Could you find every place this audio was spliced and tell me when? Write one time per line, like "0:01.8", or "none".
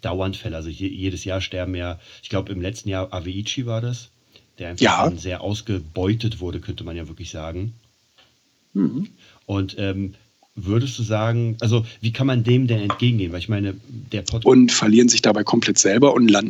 0:14.4